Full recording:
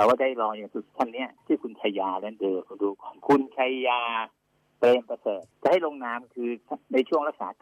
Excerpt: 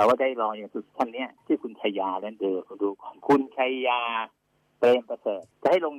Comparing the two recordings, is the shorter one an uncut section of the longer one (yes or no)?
yes